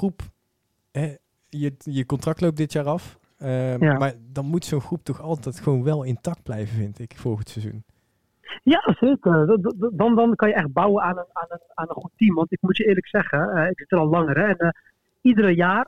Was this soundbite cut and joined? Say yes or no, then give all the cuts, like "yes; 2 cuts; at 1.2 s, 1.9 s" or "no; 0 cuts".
no; 0 cuts